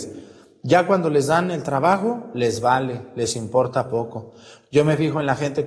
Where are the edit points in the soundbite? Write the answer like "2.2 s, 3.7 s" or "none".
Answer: none